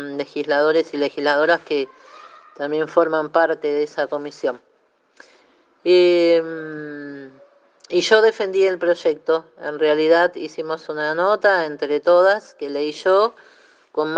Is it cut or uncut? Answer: uncut